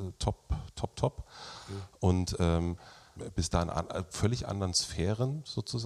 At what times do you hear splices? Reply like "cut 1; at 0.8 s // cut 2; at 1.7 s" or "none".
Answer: cut 1; at 3.2 s

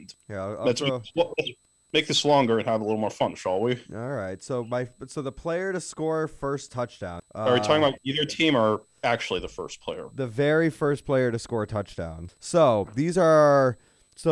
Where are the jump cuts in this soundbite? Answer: cut 1; at 7.2 s // cut 2; at 12.3 s

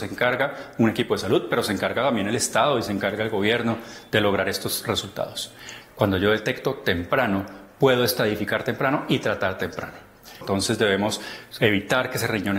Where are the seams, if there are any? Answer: cut 1; at 5.8 s // cut 2; at 10.4 s

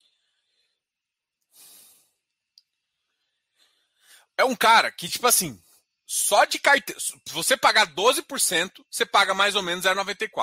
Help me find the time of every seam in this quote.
none

